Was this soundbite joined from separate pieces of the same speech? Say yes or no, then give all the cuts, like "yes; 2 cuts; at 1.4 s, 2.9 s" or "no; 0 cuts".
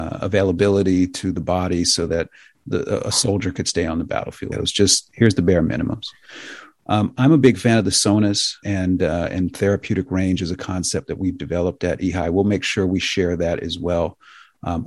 yes; 2 cuts; at 4.5 s, 8.6 s